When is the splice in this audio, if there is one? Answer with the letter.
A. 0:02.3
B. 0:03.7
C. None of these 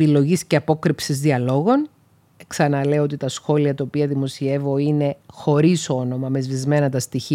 A